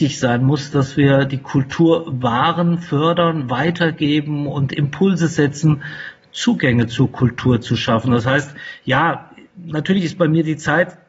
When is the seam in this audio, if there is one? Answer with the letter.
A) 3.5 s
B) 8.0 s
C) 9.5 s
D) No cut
D